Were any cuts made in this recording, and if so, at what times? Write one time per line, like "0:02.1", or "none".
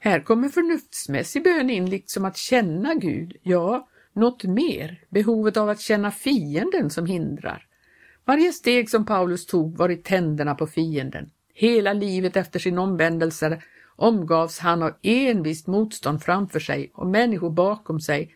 none